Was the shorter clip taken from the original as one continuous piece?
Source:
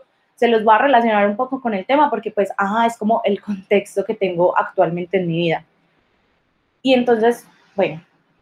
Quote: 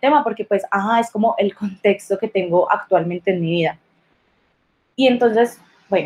yes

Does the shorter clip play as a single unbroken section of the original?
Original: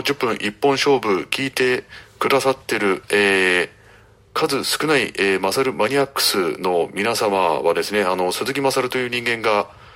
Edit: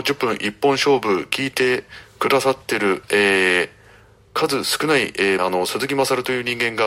no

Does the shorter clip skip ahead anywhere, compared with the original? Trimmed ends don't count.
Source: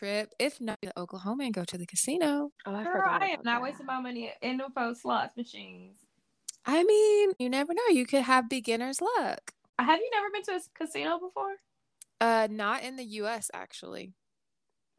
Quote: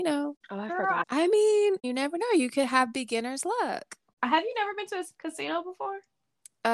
yes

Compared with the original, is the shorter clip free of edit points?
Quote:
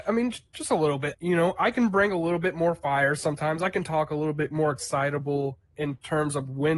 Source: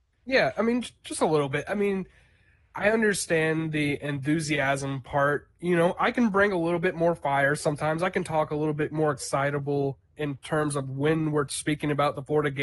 no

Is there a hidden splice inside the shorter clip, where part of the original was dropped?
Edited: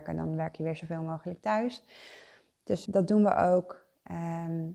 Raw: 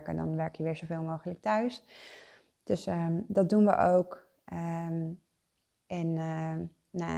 yes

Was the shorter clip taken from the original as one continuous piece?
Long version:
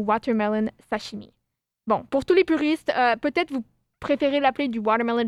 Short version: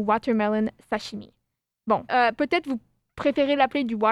no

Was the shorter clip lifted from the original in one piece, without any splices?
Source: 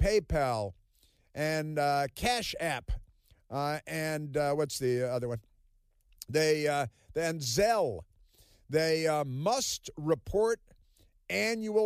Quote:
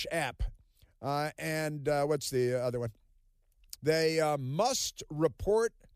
no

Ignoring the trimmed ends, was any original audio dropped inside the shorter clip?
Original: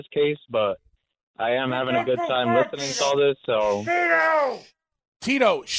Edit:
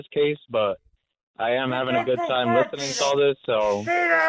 no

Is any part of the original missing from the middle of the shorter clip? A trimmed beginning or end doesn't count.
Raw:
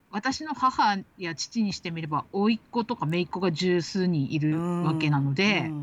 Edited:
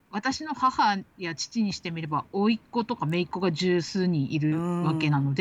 no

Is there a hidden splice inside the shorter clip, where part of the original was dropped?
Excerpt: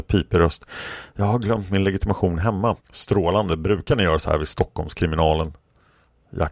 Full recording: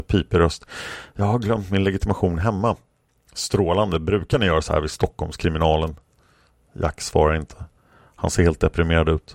yes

